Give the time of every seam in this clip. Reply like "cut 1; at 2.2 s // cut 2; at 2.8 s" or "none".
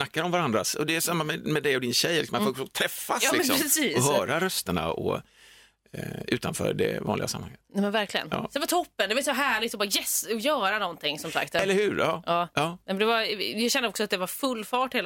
none